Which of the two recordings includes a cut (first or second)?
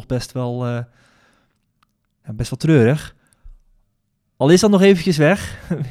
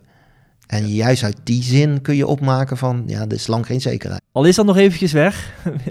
second